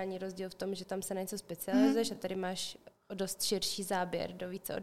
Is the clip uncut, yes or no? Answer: yes